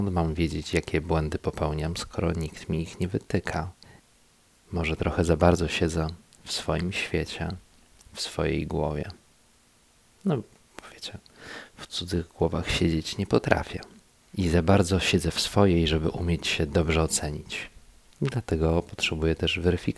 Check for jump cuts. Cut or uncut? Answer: uncut